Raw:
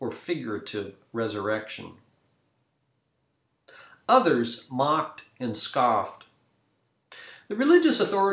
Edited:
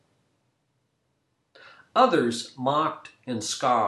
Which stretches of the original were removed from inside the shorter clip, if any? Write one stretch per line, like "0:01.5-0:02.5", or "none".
none